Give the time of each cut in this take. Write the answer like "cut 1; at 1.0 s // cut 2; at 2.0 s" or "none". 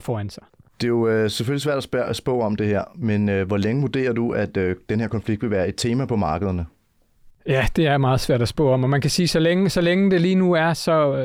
none